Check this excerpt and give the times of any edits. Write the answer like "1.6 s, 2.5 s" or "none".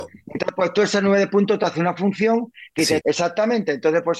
3.0 s